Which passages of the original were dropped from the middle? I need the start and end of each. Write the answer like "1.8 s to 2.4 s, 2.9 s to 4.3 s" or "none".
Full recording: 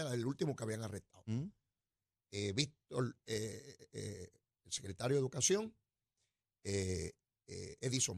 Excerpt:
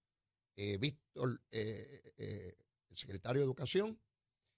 none